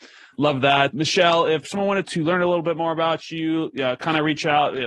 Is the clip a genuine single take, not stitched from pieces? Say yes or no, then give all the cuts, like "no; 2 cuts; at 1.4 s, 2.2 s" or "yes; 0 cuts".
yes; 0 cuts